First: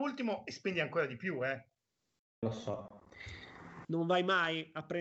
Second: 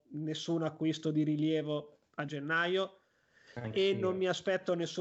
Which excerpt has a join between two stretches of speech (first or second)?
first